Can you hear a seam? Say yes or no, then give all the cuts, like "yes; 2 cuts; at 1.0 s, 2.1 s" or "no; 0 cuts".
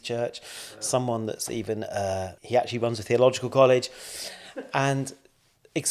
yes; 1 cut; at 2.4 s